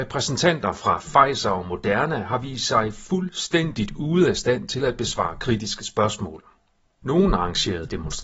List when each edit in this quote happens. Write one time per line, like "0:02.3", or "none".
0:07.0